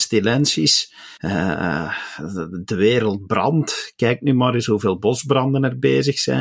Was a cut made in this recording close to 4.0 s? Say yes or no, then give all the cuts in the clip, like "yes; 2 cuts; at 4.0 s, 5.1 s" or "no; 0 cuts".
no; 1 cut; at 1.2 s